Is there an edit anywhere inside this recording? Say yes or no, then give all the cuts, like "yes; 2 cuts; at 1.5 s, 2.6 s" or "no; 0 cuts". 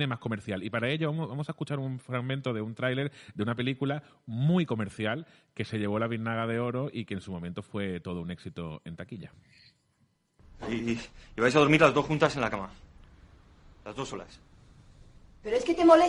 no; 0 cuts